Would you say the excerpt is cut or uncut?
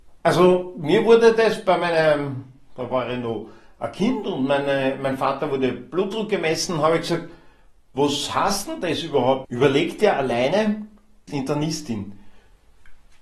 cut